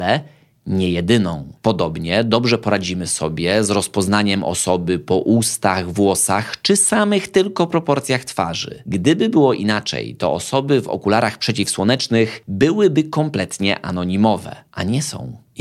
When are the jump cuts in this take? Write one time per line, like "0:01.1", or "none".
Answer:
none